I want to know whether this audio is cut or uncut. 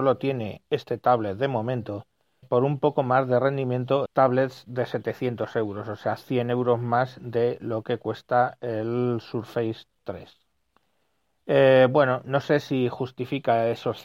cut